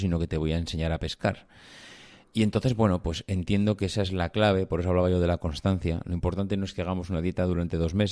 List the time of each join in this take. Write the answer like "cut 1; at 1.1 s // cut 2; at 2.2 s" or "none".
none